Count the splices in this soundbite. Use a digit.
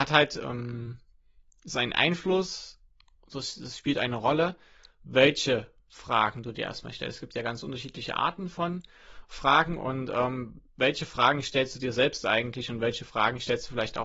0